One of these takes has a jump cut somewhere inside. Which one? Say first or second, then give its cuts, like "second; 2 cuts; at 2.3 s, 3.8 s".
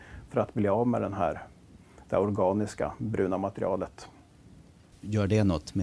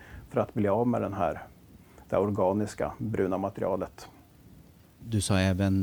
first; 1 cut; at 4.9 s